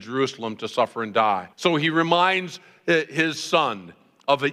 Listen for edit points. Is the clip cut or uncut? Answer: cut